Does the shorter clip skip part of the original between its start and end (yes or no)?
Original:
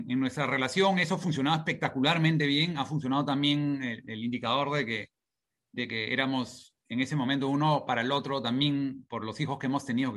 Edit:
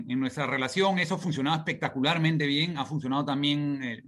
no